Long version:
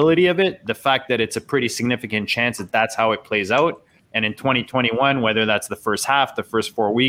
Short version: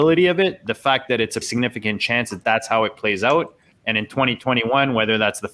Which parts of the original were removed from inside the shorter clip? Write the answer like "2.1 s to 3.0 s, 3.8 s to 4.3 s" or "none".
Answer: 1.4 s to 1.7 s